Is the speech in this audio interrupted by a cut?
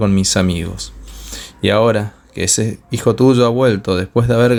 no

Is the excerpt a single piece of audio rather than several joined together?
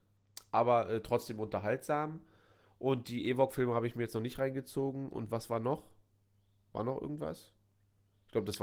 yes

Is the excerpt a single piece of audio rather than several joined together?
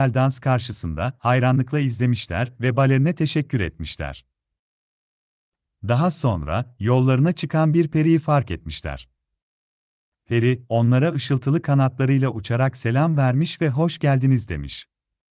yes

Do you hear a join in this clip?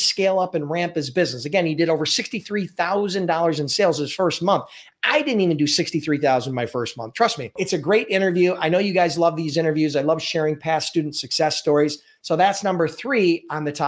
no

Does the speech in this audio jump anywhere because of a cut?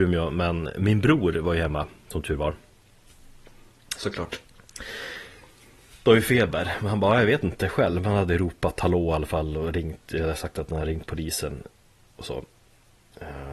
yes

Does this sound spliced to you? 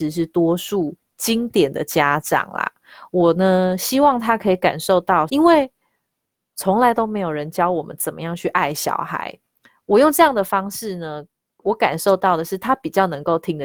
yes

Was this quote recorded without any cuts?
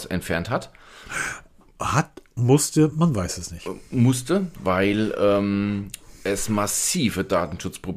no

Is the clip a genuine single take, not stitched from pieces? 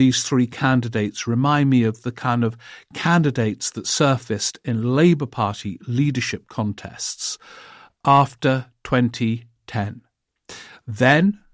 yes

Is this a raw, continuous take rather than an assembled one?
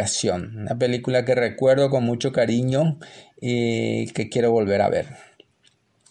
yes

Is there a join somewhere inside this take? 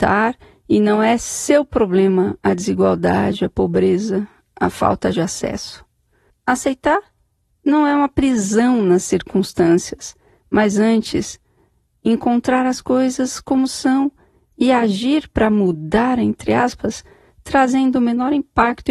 yes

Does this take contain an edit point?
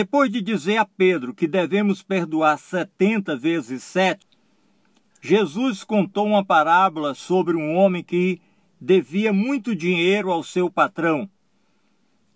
no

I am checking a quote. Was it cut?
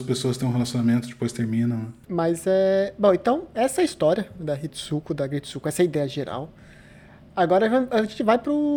no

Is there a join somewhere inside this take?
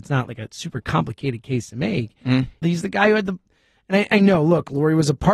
yes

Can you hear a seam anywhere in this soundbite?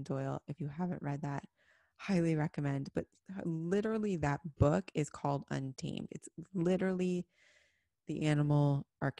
no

